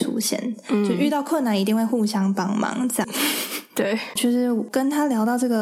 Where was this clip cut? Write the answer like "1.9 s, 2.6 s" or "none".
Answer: 3.0 s, 4.2 s